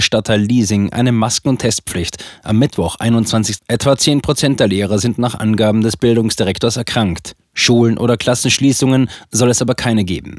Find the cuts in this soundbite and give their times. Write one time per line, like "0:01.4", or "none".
0:03.6